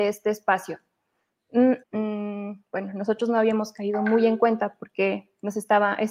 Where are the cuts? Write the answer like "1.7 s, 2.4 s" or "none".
1.8 s